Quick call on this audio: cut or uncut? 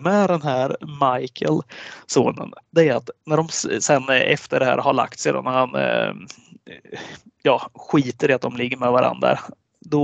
uncut